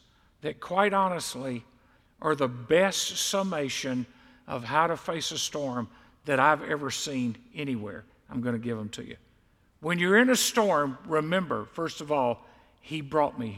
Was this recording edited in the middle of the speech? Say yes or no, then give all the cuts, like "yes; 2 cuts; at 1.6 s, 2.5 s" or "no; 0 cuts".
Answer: yes; 1 cut; at 8.1 s